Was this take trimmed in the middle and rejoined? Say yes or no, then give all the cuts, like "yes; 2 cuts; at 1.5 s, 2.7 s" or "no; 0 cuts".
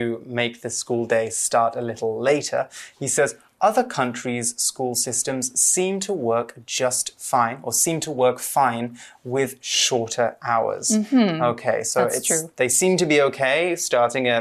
no; 0 cuts